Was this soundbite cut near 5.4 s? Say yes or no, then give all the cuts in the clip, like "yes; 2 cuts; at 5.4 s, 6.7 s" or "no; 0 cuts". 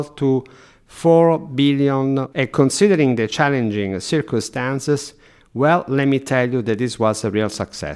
no; 1 cut; at 2.3 s